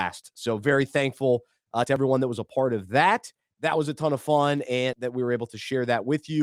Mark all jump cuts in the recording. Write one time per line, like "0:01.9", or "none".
0:03.5
0:04.9